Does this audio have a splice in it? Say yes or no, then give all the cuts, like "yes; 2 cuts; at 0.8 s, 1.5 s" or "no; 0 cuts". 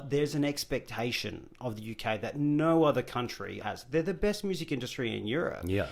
yes; 1 cut; at 3.6 s